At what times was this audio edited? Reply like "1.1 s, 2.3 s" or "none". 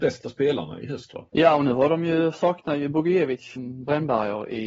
1.3 s, 3.6 s